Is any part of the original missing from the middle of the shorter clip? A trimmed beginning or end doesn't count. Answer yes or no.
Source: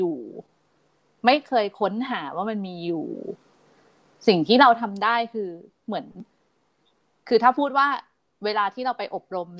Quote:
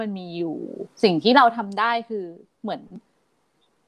yes